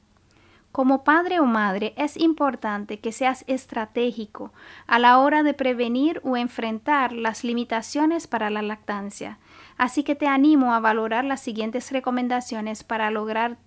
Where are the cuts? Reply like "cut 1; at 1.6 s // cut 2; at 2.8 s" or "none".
none